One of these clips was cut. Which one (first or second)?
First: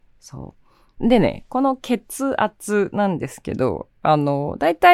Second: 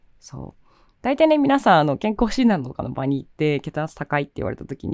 first